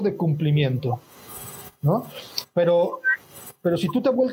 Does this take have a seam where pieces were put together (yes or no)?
no